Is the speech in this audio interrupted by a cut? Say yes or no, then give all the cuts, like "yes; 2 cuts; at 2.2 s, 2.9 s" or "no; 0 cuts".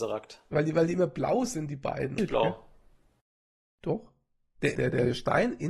yes; 2 cuts; at 2.2 s, 4.8 s